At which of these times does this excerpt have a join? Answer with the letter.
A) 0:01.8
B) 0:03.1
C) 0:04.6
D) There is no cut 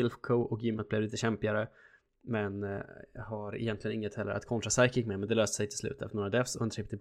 D